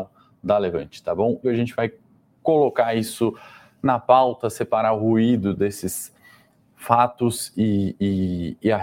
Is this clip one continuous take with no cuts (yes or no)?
no